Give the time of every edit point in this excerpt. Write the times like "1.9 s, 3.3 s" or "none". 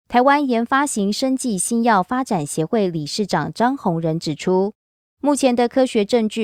none